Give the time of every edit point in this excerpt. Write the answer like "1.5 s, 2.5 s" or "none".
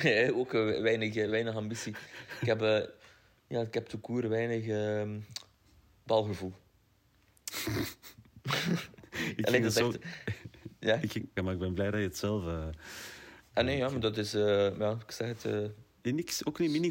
11.4 s